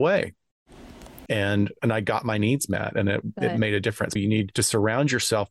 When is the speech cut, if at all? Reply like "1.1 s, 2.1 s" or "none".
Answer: 1.3 s, 4.2 s